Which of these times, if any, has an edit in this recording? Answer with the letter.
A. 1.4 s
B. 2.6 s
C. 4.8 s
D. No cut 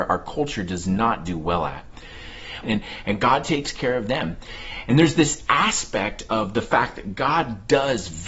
B